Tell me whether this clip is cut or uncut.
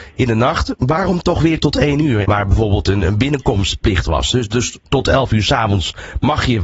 cut